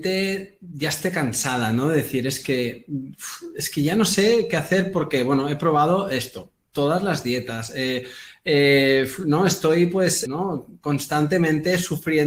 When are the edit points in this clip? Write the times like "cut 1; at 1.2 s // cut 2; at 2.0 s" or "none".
cut 1; at 10.3 s